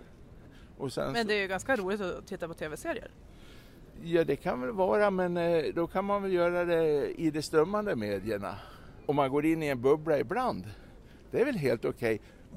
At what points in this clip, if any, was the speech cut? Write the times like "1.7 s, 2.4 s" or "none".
9.0 s